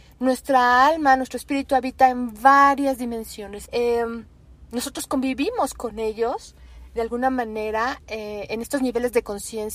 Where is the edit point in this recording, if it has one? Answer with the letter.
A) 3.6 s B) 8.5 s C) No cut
A